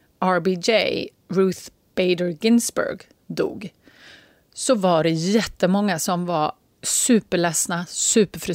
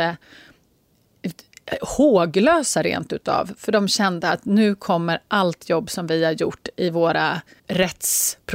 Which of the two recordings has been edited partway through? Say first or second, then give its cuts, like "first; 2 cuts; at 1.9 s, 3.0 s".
second; 1 cut; at 7.6 s